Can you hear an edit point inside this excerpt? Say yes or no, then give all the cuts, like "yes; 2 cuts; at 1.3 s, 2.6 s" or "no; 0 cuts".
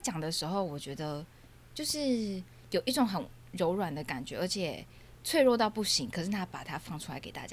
no; 0 cuts